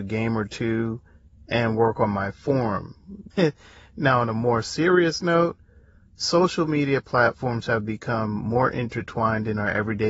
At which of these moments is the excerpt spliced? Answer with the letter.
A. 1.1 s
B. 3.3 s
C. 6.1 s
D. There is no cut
B